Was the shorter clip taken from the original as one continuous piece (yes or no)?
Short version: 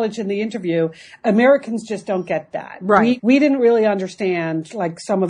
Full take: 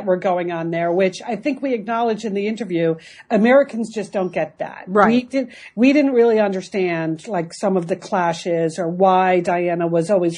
no